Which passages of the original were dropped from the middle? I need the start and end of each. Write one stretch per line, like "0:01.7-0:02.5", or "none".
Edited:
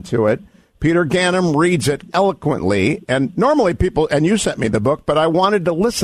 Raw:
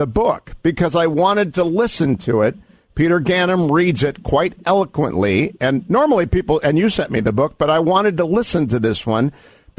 0:04.2-0:04.6